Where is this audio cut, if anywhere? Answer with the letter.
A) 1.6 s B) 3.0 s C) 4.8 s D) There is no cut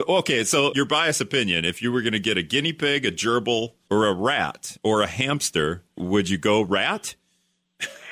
D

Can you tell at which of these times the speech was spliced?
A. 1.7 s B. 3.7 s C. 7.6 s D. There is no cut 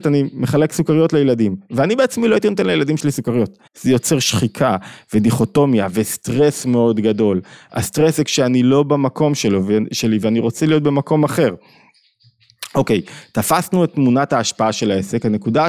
B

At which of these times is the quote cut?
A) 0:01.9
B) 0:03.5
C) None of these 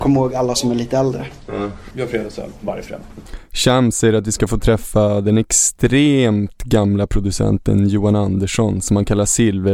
A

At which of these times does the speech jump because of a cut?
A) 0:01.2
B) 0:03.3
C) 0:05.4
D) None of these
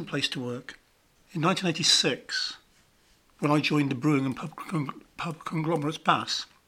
A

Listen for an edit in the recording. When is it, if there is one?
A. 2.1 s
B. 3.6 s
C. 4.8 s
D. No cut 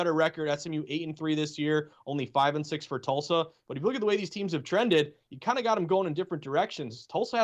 D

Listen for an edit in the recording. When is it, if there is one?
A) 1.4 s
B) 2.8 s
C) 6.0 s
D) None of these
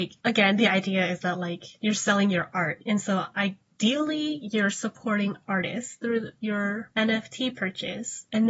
C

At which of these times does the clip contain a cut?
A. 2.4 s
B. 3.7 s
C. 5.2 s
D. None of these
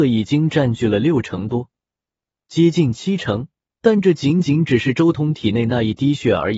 B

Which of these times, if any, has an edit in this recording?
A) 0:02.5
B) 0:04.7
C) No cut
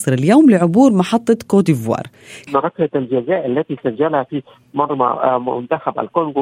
A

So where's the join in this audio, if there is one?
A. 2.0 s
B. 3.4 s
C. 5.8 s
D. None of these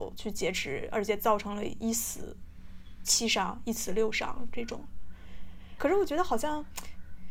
C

